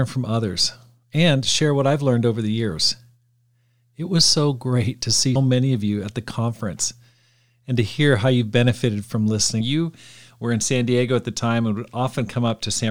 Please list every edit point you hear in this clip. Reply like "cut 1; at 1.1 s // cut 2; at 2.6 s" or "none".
cut 1; at 5.4 s // cut 2; at 9.6 s